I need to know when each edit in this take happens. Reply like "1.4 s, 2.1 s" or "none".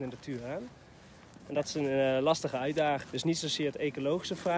1.4 s, 3.0 s